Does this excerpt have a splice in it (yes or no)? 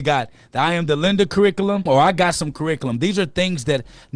yes